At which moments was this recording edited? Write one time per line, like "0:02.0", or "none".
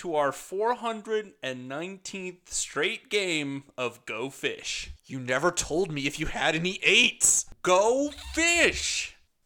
none